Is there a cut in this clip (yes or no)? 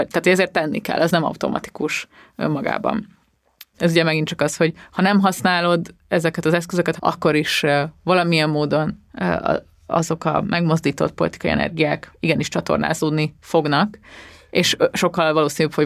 yes